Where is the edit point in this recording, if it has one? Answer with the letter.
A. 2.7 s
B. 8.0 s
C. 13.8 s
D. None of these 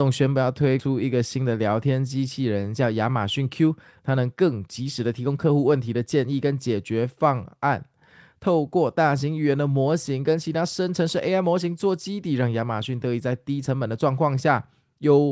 D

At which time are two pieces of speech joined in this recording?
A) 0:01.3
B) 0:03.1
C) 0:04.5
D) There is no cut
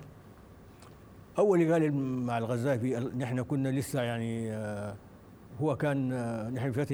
A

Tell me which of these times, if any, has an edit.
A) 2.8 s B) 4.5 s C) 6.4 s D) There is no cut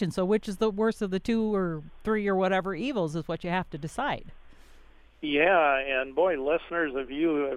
D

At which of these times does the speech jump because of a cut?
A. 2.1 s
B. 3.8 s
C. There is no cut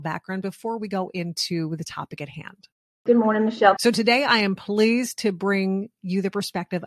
B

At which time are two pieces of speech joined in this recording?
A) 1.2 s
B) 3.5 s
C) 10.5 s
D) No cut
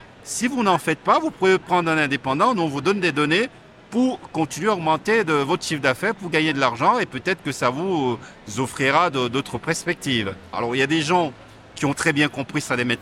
C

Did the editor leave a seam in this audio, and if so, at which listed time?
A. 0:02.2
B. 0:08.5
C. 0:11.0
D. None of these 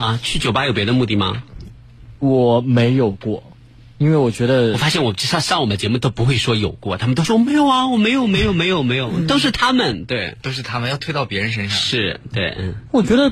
C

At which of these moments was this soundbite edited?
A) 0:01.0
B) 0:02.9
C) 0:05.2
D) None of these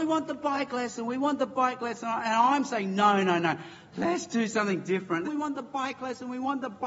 C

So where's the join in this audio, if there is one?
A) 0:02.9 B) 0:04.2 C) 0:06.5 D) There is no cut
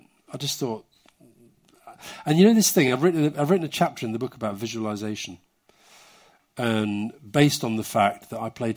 D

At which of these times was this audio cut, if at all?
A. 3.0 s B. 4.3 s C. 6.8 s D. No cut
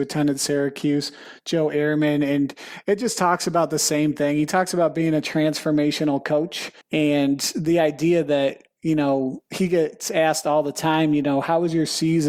C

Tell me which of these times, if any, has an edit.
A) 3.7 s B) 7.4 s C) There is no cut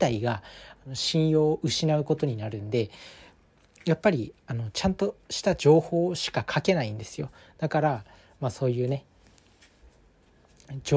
C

